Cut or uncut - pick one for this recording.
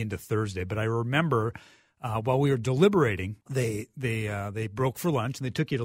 cut